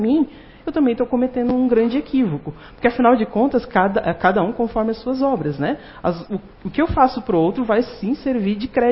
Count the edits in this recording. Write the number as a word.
zero